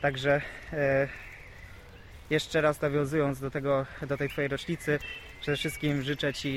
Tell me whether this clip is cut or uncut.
uncut